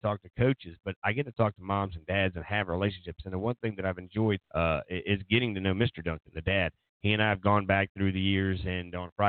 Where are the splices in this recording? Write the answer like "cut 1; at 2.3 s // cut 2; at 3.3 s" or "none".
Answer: cut 1; at 4.4 s